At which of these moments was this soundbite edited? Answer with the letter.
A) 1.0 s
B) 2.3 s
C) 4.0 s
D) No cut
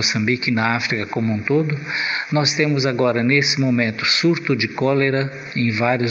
D